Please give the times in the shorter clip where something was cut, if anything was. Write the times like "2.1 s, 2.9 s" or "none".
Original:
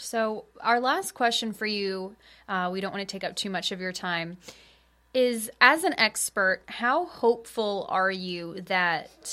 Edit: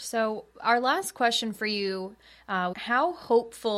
2.7 s